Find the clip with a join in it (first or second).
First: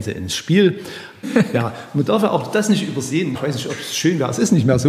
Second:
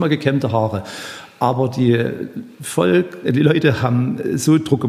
first